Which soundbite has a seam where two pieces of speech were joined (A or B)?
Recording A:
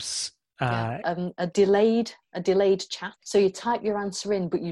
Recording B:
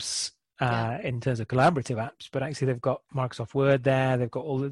A